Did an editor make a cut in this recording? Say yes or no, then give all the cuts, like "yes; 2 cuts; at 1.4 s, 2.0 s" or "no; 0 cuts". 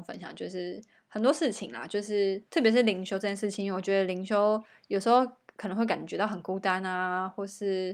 yes; 1 cut; at 2.5 s